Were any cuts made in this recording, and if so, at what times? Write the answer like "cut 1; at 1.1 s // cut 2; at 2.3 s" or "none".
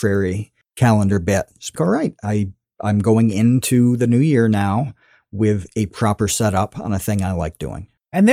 cut 1; at 1.7 s